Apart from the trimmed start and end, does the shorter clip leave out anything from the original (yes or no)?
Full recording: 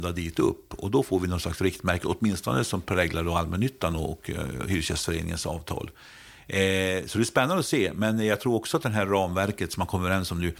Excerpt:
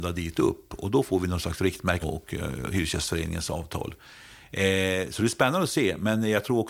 yes